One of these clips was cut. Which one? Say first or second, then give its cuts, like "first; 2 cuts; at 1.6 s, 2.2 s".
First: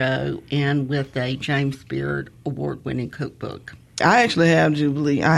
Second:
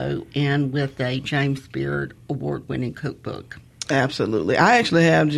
first; 1 cut; at 4.0 s